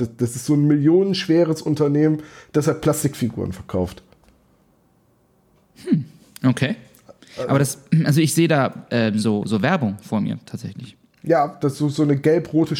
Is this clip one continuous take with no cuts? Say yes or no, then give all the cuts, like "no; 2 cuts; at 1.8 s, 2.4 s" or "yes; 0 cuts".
yes; 0 cuts